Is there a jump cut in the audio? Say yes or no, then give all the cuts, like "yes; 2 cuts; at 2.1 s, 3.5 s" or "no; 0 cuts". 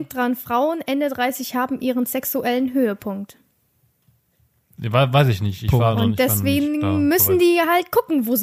no; 0 cuts